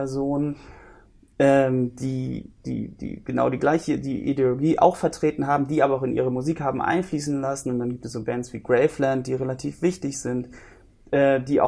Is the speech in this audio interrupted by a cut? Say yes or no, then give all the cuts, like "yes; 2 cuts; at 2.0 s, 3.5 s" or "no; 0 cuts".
no; 0 cuts